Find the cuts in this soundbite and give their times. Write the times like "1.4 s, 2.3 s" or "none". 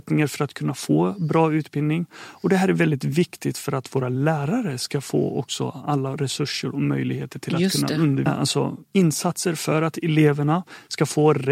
8.3 s